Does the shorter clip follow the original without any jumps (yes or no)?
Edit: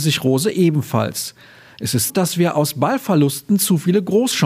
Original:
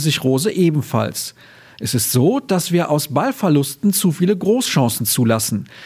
no